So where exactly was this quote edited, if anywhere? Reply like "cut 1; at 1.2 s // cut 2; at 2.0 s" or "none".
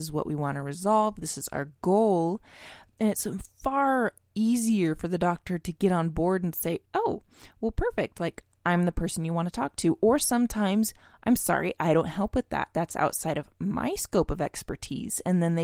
none